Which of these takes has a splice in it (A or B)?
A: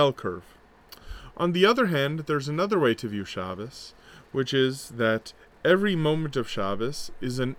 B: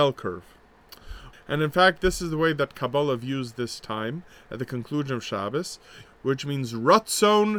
B